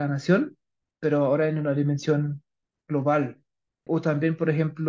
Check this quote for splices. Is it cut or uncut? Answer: cut